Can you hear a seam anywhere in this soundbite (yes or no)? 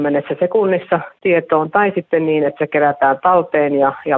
no